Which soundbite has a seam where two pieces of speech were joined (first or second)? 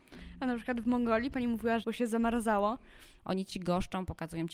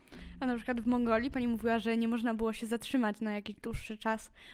first